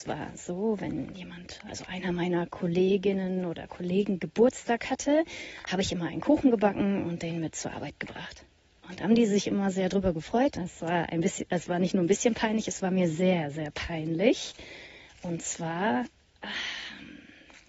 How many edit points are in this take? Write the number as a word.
one